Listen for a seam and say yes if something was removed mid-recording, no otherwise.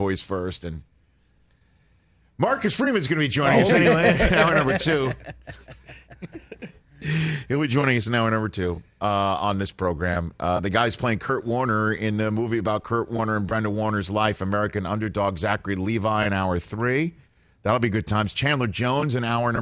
no